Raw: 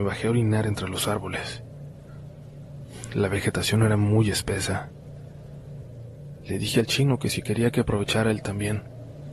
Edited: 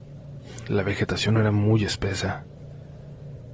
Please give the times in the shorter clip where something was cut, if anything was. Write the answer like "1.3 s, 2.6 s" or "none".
none